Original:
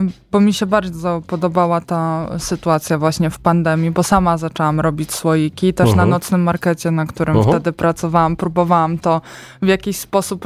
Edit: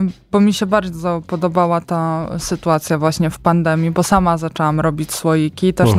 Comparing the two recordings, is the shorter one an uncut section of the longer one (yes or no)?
yes